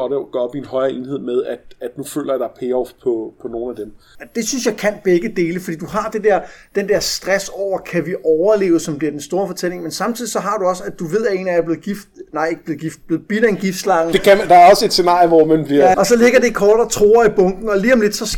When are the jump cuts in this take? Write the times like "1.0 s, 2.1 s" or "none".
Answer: 4.1 s, 15.9 s